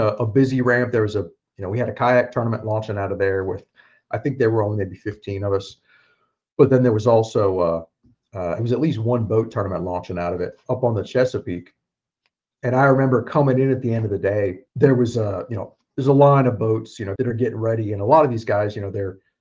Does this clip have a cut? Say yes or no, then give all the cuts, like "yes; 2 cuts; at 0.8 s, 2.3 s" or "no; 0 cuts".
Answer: yes; 2 cuts; at 14.7 s, 17.2 s